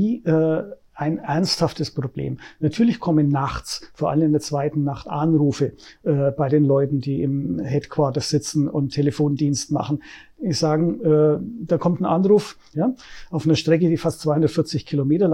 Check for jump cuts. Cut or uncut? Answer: cut